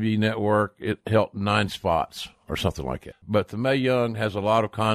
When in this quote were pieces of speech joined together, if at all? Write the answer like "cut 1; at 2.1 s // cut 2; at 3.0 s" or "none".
cut 1; at 3.1 s